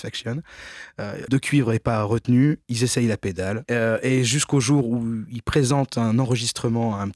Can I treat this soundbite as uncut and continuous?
no; 2 cuts; at 1.3 s, 3.6 s

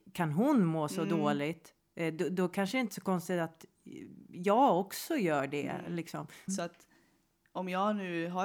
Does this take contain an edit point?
yes; 1 cut; at 6.5 s

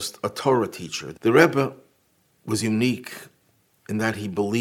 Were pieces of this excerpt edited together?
yes; 1 cut; at 1.1 s

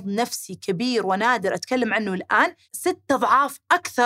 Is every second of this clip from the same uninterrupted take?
no; 1 cut; at 2.6 s

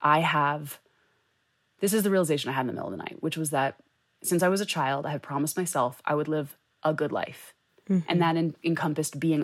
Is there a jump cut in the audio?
no; 0 cuts

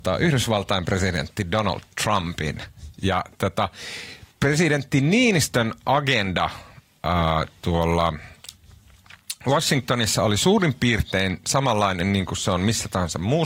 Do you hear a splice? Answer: yes; 1 cut; at 4.3 s

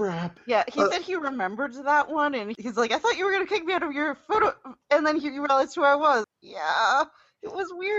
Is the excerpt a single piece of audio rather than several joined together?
no; 1 cut; at 6.2 s

